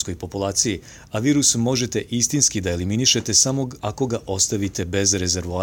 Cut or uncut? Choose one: uncut